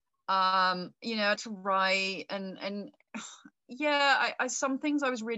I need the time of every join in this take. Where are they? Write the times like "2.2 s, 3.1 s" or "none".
1.4 s